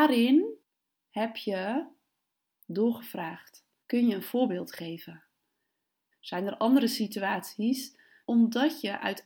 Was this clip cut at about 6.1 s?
yes; 3 cuts; at 3.8 s, 6.1 s, 8.2 s

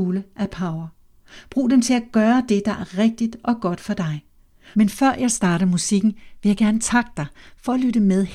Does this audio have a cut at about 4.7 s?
yes; 1 cut; at 4.7 s

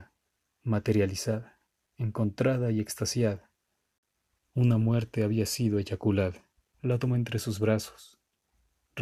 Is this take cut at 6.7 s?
yes; 2 cuts; at 4.5 s, 6.7 s

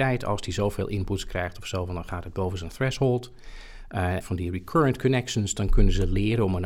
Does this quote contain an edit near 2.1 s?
no; 1 cut; at 4.2 s

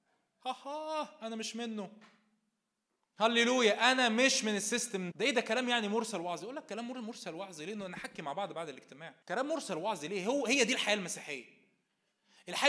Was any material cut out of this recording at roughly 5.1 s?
yes; 2 cuts; at 5.1 s, 9.2 s

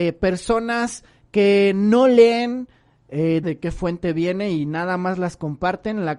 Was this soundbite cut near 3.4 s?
yes; 1 cut; at 3.4 s

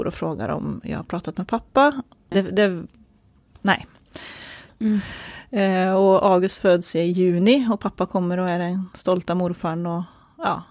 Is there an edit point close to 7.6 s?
no; 2 cuts; at 2.3 s, 4.7 s

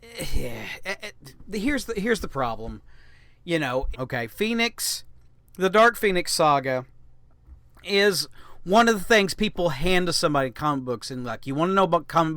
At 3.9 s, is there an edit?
yes; 1 cut; at 3.9 s

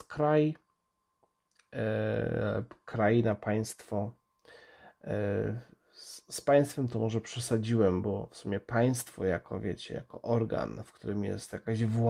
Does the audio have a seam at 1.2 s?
no; 0 cuts

